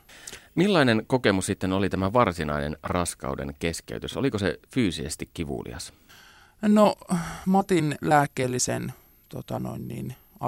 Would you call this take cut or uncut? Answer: uncut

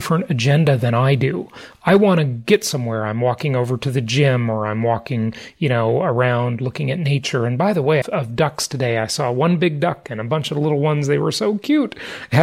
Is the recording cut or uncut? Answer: cut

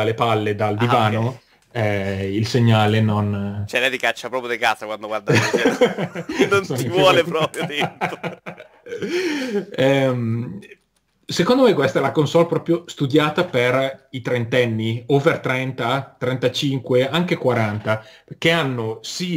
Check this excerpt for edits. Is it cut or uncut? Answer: uncut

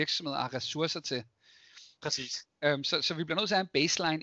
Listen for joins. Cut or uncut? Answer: cut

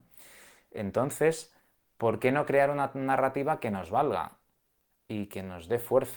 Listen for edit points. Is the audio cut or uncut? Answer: uncut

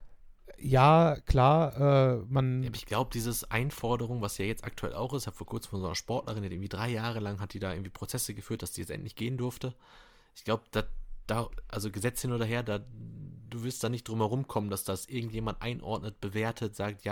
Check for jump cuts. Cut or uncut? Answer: uncut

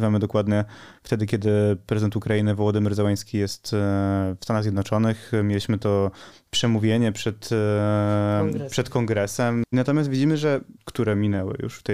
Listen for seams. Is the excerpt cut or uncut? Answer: cut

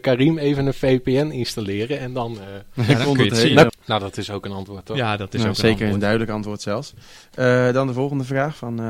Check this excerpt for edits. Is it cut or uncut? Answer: cut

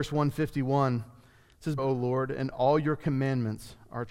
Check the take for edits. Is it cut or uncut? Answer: cut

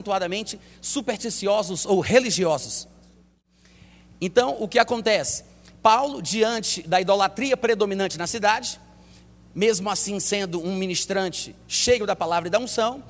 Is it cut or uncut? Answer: uncut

